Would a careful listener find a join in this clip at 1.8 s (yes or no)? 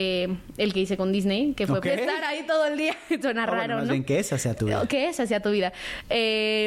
yes